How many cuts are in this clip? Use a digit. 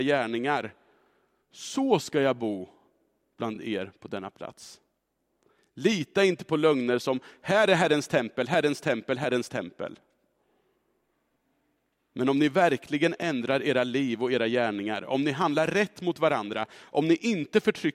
0